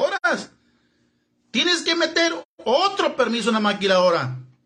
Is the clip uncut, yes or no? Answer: yes